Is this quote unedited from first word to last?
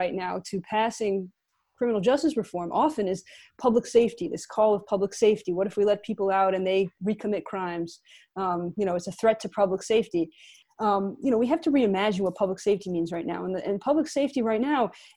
yes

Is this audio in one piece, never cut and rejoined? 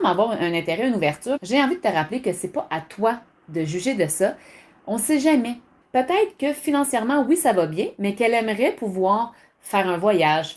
no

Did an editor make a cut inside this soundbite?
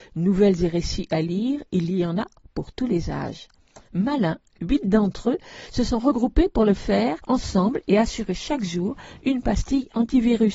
no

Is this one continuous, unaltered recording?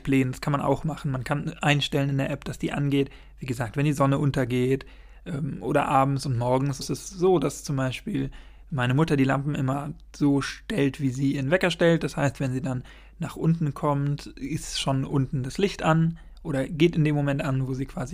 no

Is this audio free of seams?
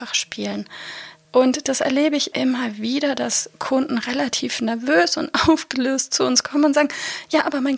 no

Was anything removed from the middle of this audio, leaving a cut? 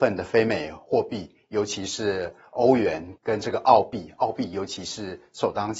yes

